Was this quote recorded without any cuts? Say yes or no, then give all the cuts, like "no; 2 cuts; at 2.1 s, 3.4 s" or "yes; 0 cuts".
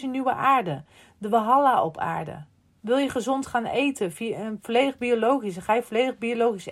no; 1 cut; at 2.7 s